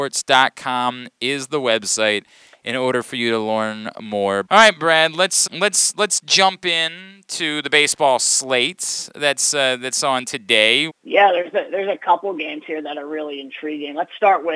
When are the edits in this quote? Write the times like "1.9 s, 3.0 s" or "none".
4.5 s, 5.5 s, 10.9 s